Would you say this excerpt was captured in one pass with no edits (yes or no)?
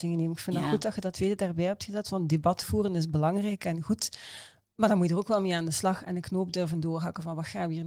yes